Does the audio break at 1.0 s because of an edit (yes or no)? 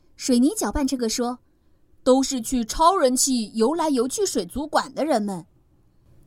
yes